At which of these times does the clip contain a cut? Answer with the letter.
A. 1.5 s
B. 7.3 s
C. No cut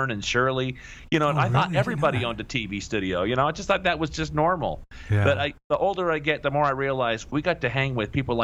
B